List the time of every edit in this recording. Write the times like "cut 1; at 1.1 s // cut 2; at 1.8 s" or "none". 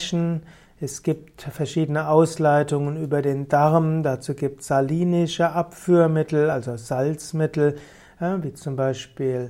none